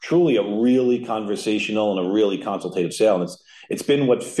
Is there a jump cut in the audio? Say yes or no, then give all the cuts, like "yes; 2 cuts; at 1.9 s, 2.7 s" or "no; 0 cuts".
no; 0 cuts